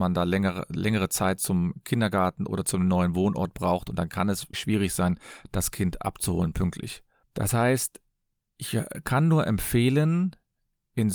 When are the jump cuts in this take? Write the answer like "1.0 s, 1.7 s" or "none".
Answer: 4.5 s

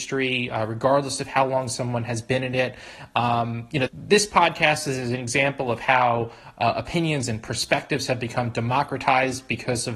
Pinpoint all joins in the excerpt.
3.9 s

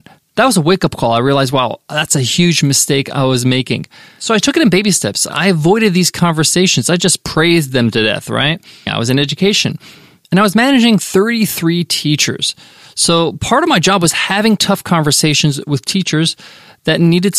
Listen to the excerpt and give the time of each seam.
5.3 s, 8.9 s

